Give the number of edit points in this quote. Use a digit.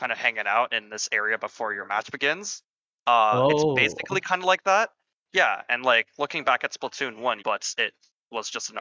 2